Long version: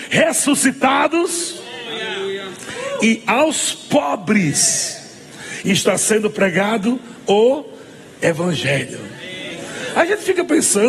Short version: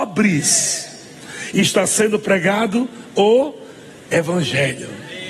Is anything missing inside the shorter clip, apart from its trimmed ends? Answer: no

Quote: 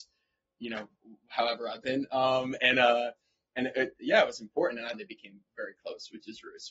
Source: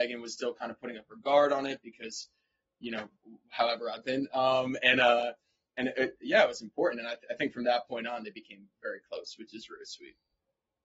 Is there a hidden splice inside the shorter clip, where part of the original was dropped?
yes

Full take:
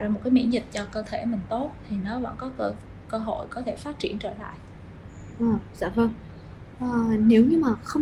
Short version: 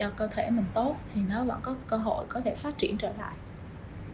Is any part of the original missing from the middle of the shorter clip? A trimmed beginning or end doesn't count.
yes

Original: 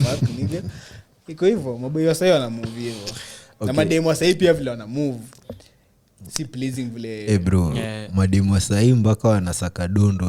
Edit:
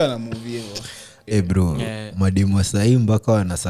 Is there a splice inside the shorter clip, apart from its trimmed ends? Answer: yes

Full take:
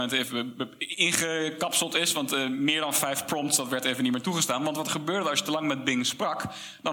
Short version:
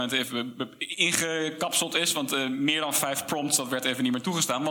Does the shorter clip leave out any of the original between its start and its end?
no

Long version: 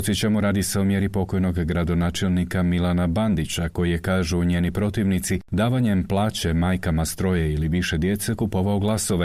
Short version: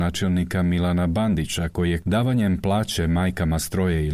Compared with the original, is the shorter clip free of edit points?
no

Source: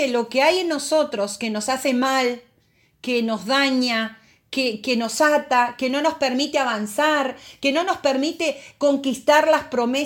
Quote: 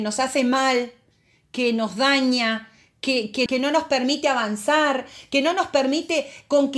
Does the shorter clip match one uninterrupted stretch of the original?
no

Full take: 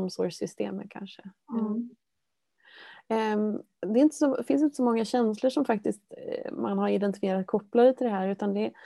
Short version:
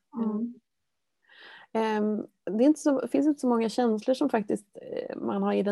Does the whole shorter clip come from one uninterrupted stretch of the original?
yes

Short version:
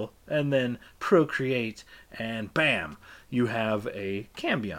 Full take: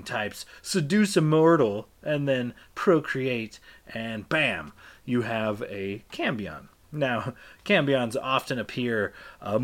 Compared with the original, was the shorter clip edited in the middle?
no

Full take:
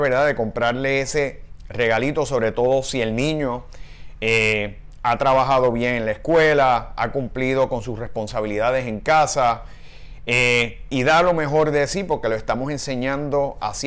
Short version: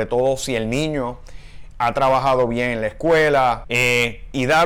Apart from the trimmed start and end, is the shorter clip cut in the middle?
yes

